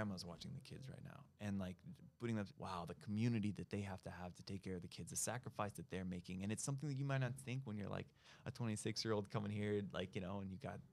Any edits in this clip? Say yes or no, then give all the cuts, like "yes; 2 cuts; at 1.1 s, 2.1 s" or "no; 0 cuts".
yes; 1 cut; at 2.5 s